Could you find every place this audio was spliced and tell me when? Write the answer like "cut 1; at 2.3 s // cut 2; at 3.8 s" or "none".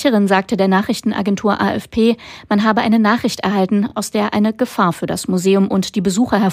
none